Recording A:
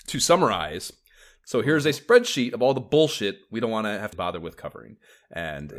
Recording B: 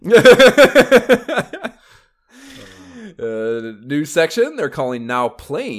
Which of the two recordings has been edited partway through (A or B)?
A